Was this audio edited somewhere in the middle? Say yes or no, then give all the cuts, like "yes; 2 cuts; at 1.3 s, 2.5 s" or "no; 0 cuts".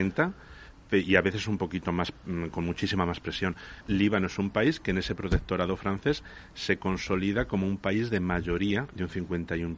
yes; 1 cut; at 3.8 s